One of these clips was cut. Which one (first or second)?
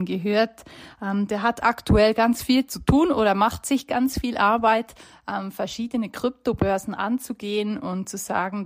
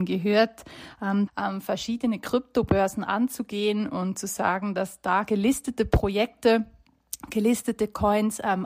second